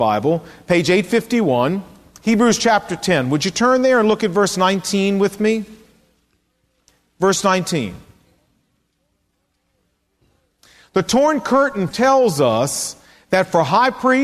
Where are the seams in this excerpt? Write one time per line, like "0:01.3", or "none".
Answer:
0:11.9